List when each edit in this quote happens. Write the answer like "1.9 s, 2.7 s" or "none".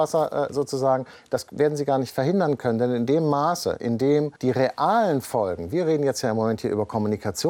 4.4 s